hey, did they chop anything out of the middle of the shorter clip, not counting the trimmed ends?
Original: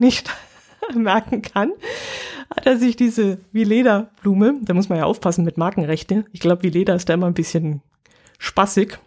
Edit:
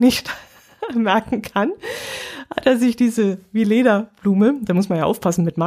no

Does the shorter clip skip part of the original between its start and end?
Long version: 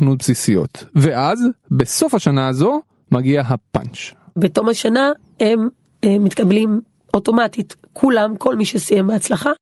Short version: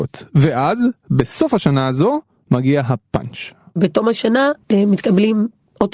yes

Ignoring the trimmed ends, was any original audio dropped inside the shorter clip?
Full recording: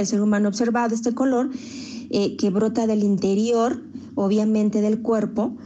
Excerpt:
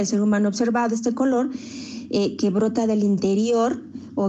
no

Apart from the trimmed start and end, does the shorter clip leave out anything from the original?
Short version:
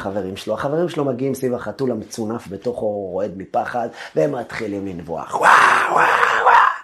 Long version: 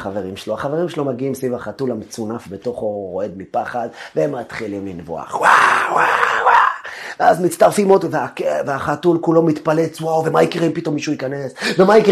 no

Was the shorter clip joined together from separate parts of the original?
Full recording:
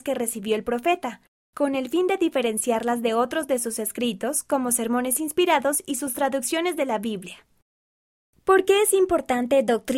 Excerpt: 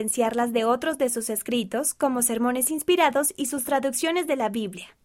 no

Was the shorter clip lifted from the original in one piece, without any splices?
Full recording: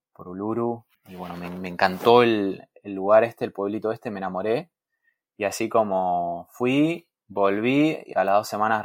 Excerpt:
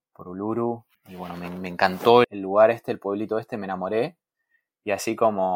no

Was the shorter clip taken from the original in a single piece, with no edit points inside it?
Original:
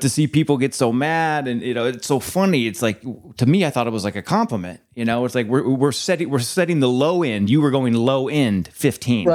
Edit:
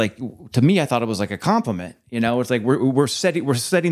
yes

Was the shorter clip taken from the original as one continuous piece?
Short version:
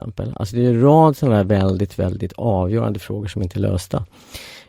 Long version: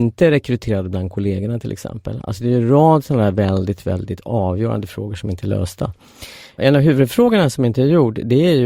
yes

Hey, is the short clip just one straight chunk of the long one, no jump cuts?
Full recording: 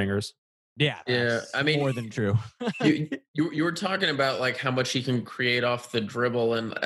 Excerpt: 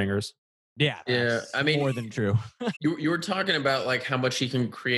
no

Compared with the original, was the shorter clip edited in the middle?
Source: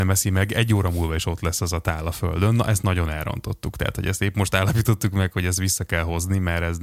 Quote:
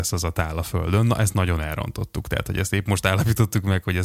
no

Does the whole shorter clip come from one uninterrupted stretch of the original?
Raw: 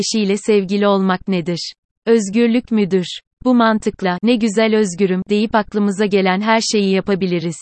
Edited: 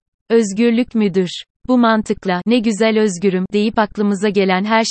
yes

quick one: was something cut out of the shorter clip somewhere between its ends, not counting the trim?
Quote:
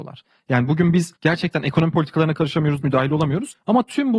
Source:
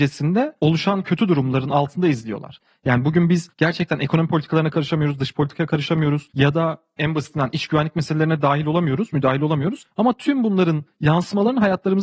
yes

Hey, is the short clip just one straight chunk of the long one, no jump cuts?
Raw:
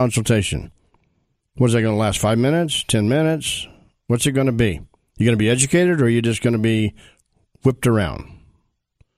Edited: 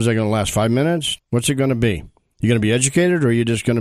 no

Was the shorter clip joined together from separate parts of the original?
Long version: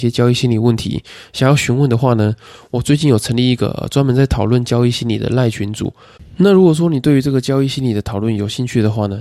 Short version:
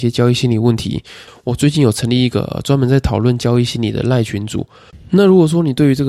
yes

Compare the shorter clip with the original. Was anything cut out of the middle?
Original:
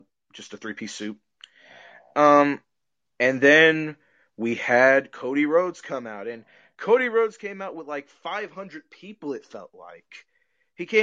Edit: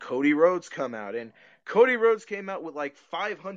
no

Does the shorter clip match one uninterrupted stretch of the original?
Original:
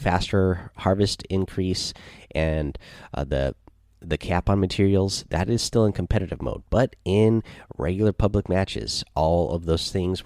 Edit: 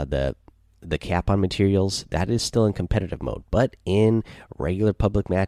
yes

